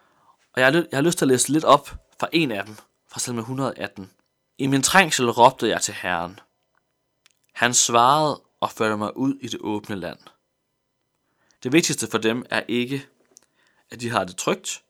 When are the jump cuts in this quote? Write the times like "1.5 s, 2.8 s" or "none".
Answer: 4.5 s, 11.5 s

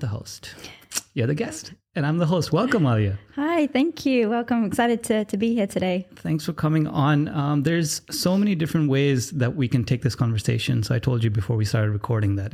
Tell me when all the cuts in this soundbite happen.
none

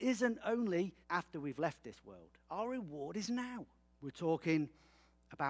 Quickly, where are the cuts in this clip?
1.0 s, 3.9 s

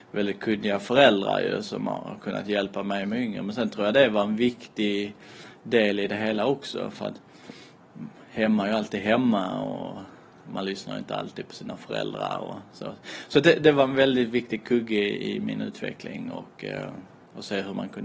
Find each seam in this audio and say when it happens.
none

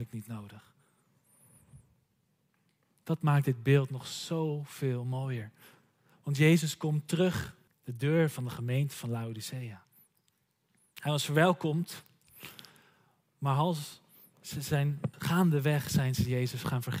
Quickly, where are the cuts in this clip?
7.7 s, 15.1 s

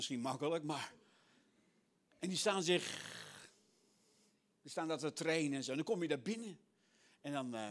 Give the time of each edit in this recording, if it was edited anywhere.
none

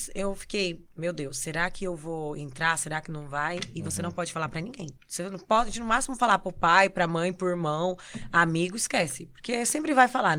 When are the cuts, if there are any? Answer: 0.9 s, 5.0 s

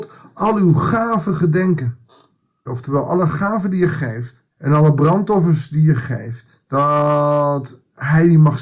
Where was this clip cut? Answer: 2.7 s, 4.5 s, 6.6 s

